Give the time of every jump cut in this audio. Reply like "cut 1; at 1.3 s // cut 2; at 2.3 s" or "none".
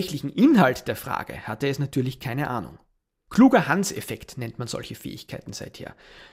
none